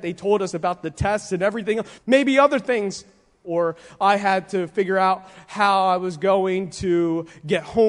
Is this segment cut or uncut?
cut